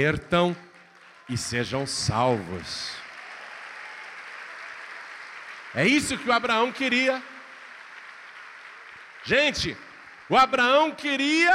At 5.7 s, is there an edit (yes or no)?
no